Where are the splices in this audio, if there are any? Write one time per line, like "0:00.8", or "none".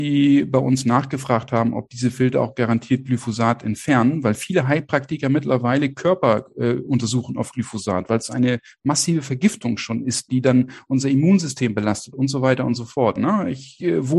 0:10.3
0:13.2